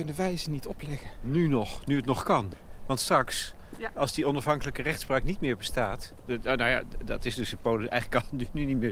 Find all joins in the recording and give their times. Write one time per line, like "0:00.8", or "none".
none

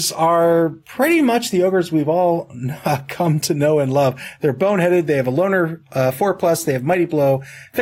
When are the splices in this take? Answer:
none

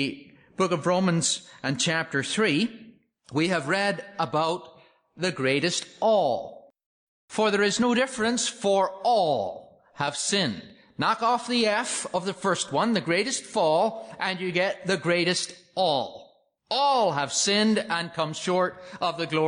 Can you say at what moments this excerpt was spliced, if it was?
none

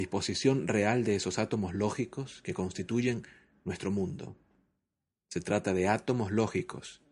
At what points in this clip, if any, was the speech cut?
0:05.1

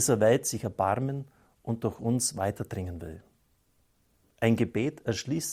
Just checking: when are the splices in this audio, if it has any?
0:04.2

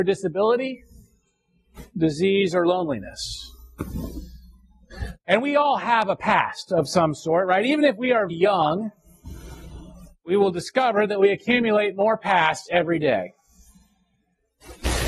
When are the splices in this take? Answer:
0:05.2
0:08.3

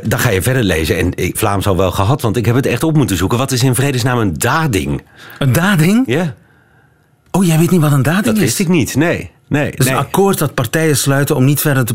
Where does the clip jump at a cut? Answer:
0:01.3

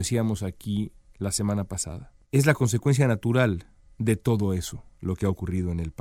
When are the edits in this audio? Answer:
0:02.2

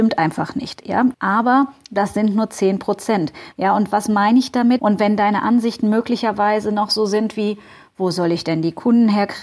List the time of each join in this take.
0:01.1
0:03.5
0:04.8

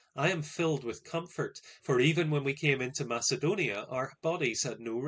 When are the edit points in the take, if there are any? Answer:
0:01.8

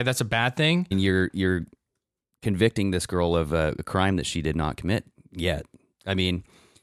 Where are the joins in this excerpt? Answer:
0:00.9

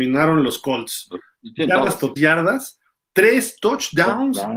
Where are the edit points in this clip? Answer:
0:02.2

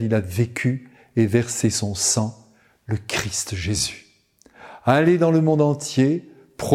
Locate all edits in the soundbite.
none

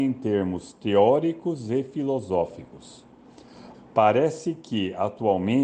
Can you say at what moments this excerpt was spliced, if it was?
0:03.7

